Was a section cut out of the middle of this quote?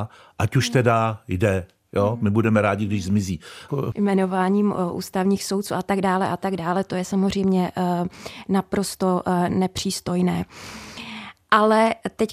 yes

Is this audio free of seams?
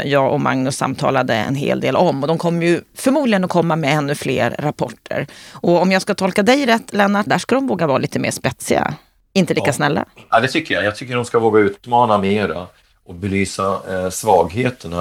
no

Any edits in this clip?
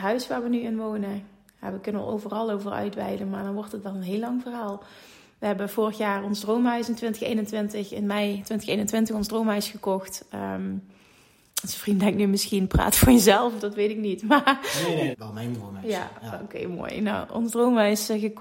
yes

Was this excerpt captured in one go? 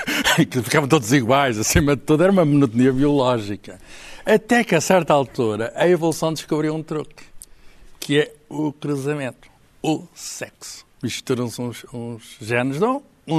yes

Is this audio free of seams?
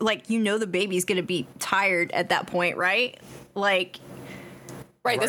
yes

